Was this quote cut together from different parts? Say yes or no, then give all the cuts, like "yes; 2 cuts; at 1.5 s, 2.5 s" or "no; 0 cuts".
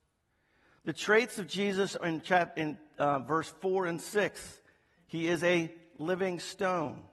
no; 0 cuts